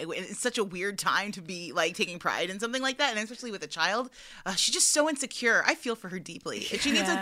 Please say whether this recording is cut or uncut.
uncut